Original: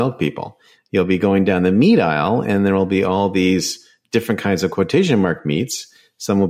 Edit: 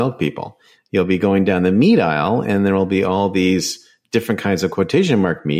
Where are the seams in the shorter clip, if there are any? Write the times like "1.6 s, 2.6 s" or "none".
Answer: none